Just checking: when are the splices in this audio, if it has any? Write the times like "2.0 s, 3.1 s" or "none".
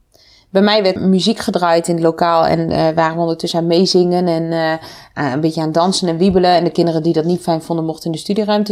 1.0 s